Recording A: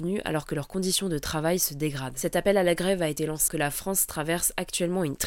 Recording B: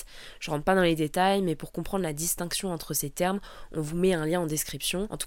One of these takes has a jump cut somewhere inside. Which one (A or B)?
A